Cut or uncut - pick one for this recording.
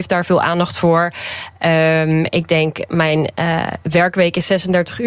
uncut